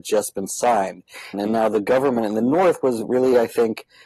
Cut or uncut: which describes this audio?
cut